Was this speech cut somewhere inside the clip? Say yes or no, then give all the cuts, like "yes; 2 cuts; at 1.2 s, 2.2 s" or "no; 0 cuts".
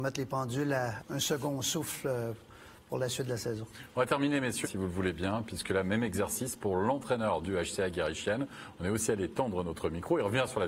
yes; 2 cuts; at 1.0 s, 4.6 s